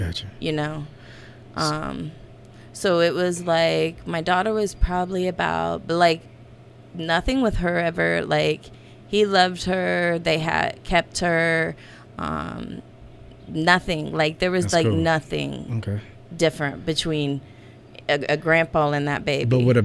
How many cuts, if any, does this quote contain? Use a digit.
1